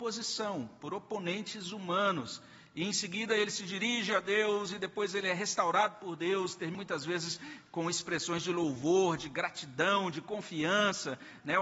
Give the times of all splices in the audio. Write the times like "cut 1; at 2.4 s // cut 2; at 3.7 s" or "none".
none